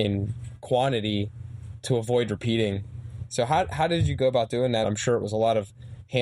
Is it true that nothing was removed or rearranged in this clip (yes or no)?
no